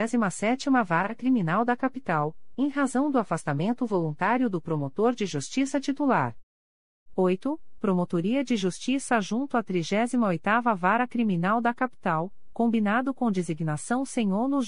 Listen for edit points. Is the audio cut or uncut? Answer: uncut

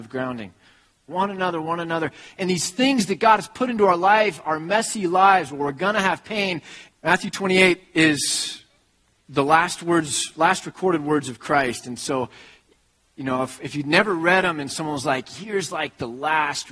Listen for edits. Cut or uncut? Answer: cut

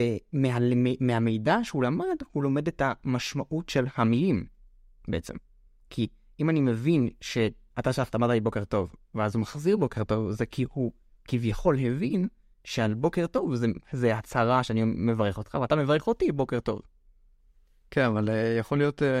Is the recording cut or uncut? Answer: uncut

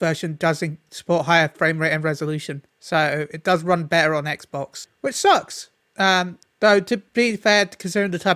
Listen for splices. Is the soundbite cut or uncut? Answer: uncut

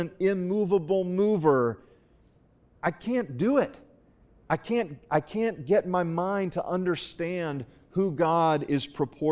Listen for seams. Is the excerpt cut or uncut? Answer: uncut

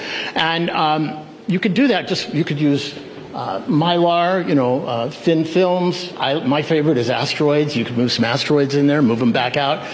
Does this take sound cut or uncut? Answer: uncut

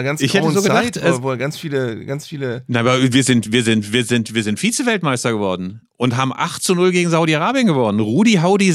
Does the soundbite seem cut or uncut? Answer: uncut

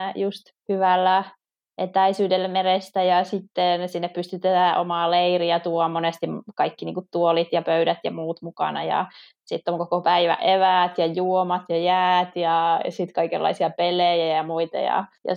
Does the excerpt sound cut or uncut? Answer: uncut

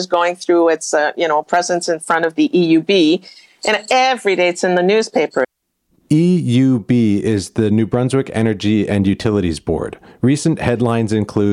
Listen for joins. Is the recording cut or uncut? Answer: uncut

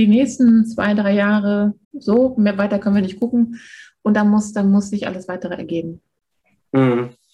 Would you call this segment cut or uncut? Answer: cut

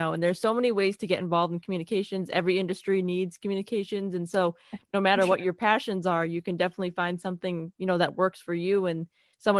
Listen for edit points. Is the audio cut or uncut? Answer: uncut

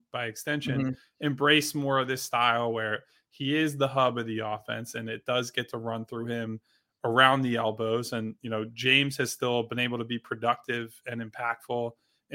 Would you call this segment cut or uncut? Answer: uncut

